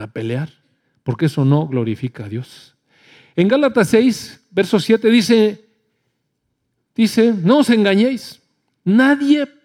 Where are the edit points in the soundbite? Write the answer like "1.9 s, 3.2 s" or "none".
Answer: none